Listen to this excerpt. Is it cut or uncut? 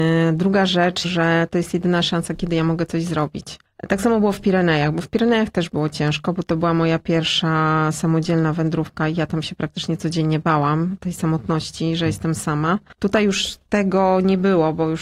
cut